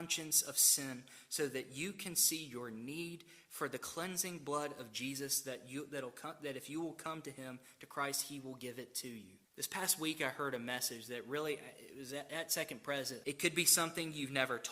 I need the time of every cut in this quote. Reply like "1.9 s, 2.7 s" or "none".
9.4 s, 13.2 s